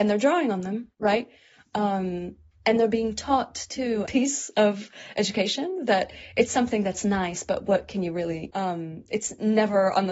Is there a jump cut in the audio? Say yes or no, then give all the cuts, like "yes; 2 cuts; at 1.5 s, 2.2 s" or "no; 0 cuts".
yes; 2 cuts; at 4.1 s, 8.5 s